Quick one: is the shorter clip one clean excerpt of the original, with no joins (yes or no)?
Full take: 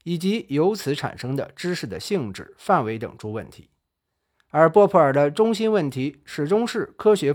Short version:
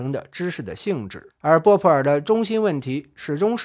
no